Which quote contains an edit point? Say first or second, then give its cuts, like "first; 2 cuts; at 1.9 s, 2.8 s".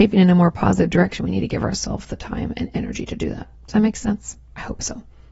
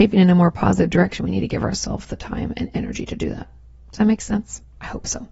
first; 1 cut; at 3.6 s